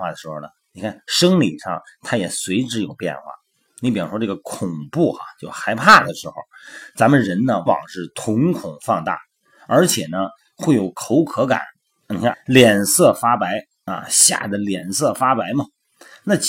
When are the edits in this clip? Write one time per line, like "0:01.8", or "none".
0:07.7
0:12.3